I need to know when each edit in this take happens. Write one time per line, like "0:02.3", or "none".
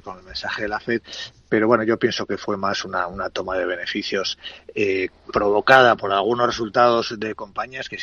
0:05.2